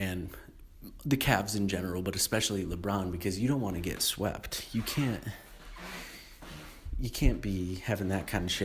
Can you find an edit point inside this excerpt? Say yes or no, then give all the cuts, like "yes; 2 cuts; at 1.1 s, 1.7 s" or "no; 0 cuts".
no; 0 cuts